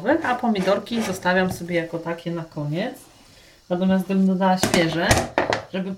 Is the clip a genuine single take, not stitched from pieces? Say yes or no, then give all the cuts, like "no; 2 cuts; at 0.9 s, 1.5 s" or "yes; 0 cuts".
yes; 0 cuts